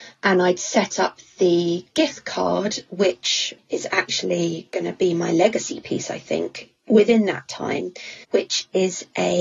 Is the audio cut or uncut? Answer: cut